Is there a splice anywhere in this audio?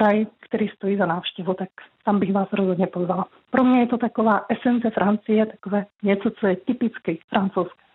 no; 0 cuts

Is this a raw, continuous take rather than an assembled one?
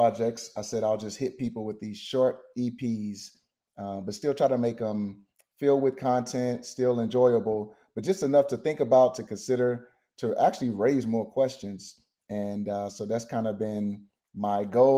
yes; 0 cuts

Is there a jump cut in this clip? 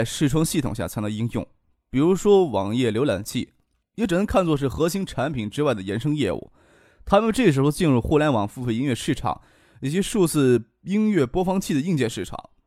yes; 1 cut; at 3.8 s

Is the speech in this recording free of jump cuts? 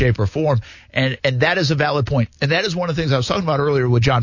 yes; 0 cuts

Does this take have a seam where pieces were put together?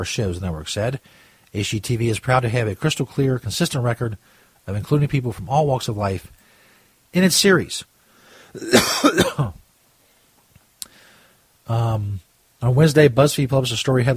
no; 0 cuts

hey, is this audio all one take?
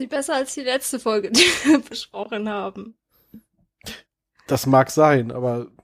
yes; 0 cuts

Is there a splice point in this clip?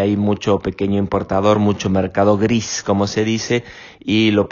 no; 0 cuts

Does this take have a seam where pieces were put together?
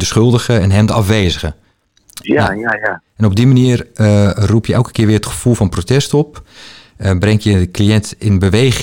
yes; 1 cut; at 2.2 s

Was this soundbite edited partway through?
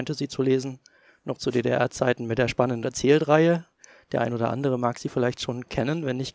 no; 0 cuts

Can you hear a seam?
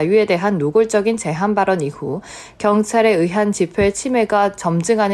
no; 0 cuts

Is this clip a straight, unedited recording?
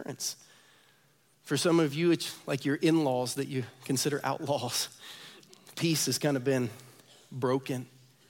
no; 1 cut; at 1.3 s

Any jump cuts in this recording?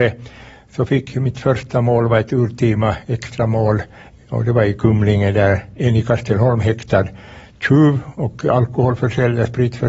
no; 0 cuts

